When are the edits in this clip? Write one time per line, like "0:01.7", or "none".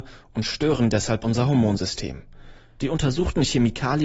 0:02.8